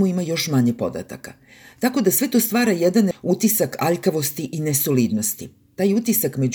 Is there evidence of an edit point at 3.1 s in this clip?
yes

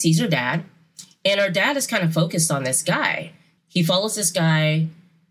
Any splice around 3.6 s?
yes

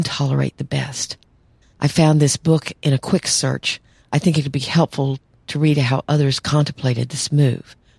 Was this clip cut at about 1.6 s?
yes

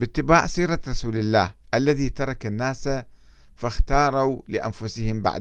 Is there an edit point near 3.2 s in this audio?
no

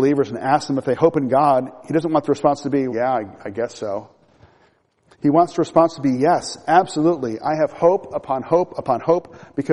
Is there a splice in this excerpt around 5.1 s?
no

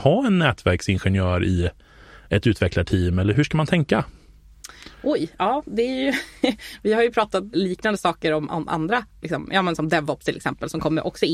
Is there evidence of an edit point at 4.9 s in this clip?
no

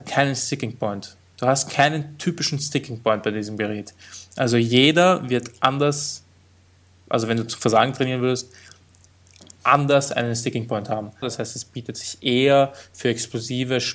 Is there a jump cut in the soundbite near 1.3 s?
no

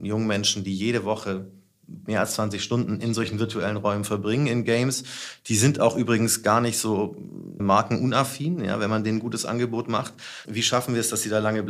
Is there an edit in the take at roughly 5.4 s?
no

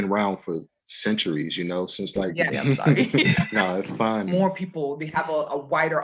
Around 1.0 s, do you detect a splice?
no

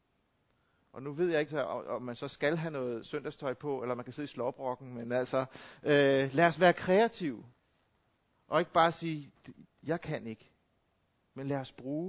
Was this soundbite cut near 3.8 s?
no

